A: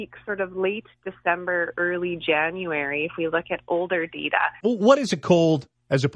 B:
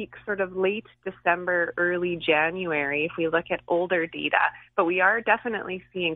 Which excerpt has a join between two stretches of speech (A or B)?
A